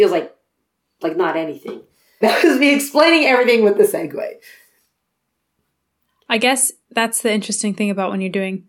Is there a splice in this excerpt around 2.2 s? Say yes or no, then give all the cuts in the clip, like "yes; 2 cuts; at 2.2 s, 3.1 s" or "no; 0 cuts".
yes; 1 cut; at 2.2 s